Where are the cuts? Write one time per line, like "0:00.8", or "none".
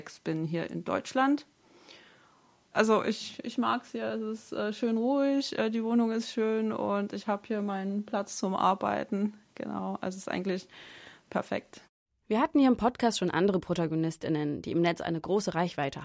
none